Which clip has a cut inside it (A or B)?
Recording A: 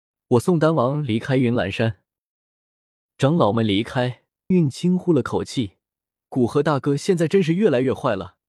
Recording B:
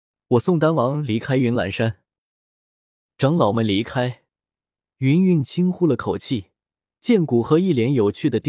A